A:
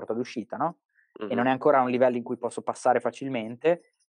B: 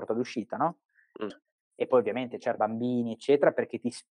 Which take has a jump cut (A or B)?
B